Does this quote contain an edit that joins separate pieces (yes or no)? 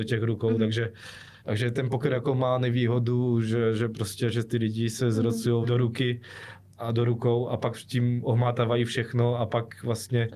yes